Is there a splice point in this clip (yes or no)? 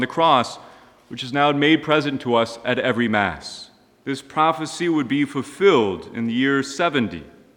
yes